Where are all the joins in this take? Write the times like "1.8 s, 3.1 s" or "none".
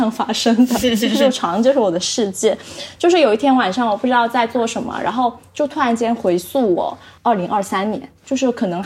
none